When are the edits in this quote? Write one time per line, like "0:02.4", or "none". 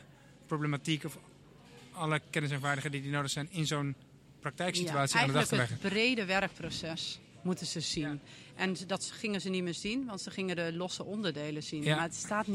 none